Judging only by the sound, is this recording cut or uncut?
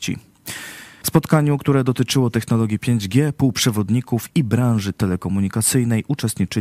cut